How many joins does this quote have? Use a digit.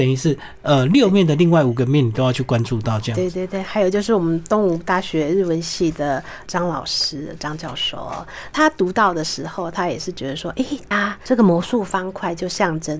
2